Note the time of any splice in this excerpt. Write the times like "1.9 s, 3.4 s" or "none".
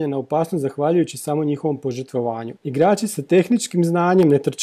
2.5 s